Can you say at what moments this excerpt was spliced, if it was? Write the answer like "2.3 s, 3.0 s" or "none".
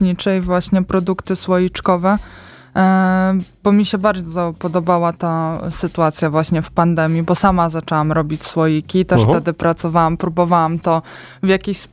9.2 s